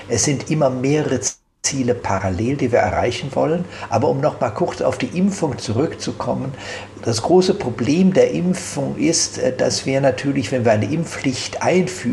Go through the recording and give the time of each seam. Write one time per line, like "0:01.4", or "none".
0:03.9

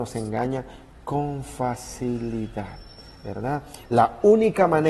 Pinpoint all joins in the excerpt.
0:03.8

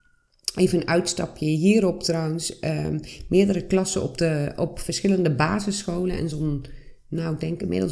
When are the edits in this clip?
none

